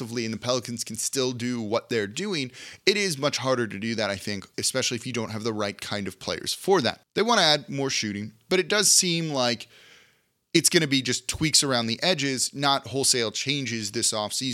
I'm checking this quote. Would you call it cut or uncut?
cut